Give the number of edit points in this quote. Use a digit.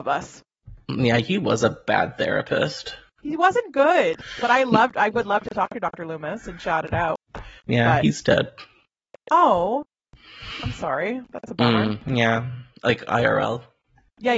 0